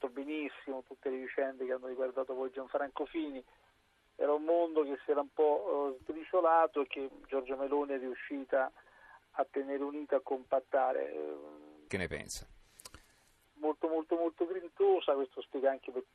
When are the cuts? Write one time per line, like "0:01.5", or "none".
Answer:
0:11.9
0:13.4